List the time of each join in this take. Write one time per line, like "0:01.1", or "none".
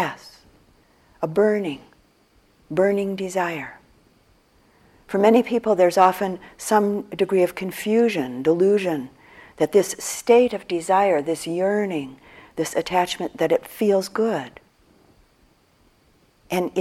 none